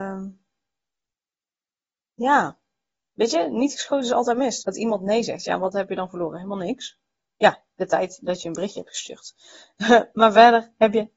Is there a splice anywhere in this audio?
yes; 1 cut; at 4.6 s

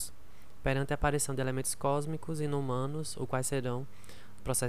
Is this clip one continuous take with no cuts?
yes; 0 cuts

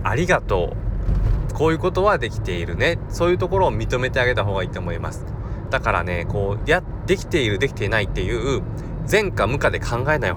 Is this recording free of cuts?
yes; 0 cuts

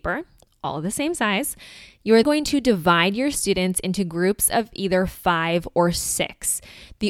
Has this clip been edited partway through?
yes; 1 cut; at 2.2 s

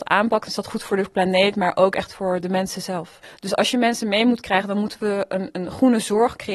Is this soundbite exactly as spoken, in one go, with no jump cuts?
yes; 0 cuts

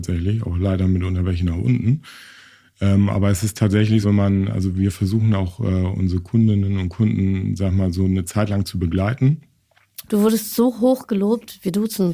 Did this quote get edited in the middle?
yes; 2 cuts; at 4.0 s, 10.1 s

